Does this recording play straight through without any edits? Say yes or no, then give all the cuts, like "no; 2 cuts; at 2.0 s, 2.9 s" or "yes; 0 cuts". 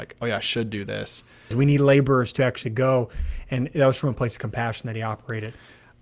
no; 1 cut; at 1.5 s